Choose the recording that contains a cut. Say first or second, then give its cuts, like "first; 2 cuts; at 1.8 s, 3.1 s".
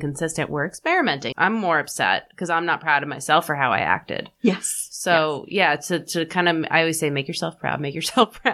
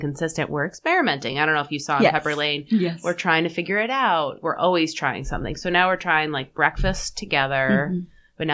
first; 1 cut; at 1.3 s